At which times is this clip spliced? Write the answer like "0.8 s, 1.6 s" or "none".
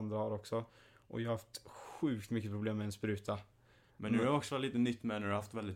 3.9 s